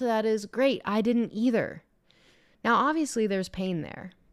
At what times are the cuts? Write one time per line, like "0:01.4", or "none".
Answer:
none